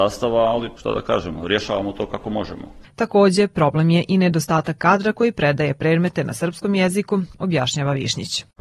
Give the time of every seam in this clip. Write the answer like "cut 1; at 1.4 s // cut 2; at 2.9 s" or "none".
cut 1; at 2.8 s // cut 2; at 7.3 s